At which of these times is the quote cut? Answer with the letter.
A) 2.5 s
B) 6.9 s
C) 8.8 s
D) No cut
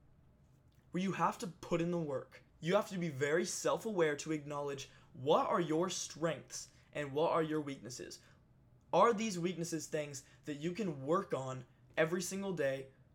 A